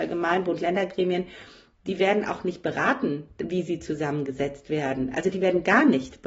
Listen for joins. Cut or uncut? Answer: uncut